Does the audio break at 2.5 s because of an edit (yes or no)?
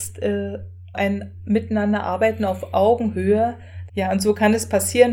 no